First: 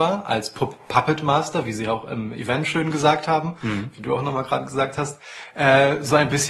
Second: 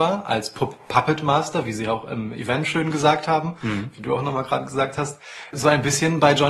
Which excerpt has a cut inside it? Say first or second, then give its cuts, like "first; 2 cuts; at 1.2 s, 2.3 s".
second; 1 cut; at 5.5 s